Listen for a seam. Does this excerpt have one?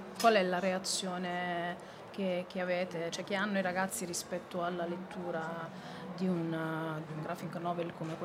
yes; 2 cuts; at 3.1 s, 7.1 s

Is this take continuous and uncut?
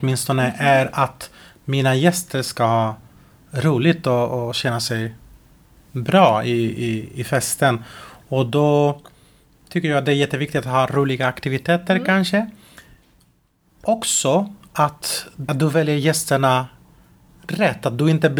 no; 1 cut; at 15.5 s

